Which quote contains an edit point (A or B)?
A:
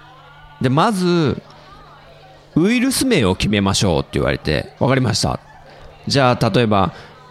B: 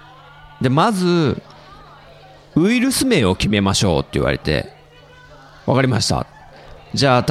A